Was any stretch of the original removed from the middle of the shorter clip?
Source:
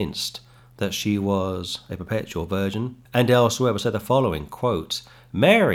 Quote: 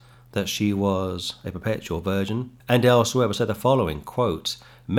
no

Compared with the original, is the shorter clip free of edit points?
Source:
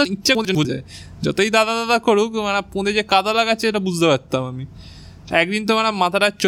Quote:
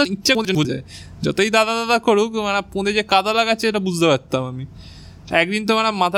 yes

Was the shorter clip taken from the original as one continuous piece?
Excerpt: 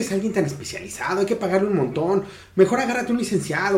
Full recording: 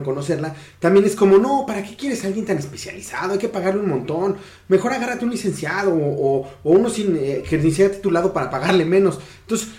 yes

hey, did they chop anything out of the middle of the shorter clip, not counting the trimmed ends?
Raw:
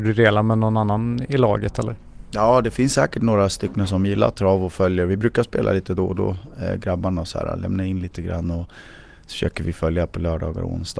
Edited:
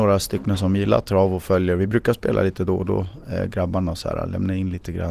no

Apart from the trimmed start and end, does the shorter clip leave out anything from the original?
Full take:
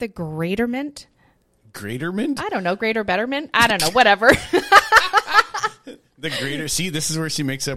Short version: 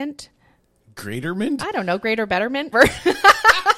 yes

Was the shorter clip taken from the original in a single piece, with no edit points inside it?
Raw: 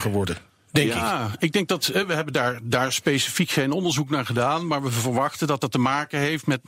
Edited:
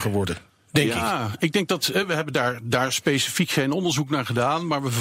yes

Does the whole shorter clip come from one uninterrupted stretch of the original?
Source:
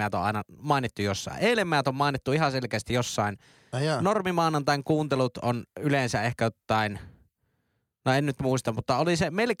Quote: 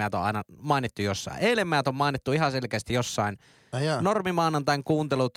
yes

